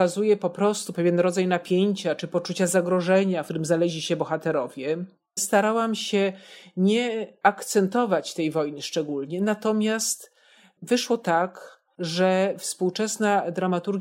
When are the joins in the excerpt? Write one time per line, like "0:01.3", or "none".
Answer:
0:05.4